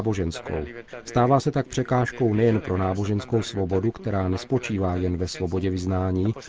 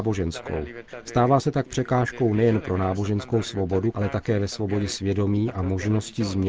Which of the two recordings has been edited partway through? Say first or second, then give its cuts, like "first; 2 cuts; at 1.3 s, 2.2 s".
second; 1 cut; at 3.9 s